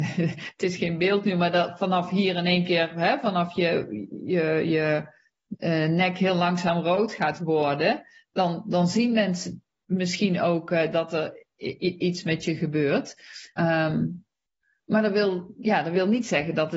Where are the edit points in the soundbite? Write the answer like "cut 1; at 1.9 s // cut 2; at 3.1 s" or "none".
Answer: cut 1; at 13.6 s